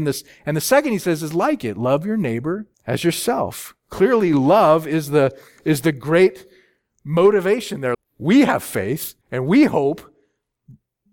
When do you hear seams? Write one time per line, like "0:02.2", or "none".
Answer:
0:02.7
0:07.9
0:09.2